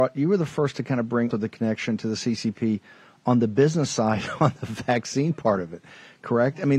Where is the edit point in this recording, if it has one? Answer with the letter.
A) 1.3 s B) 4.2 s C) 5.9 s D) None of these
A